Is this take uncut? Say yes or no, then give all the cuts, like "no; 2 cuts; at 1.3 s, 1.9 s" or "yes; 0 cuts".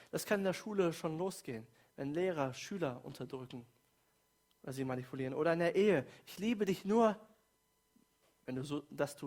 yes; 0 cuts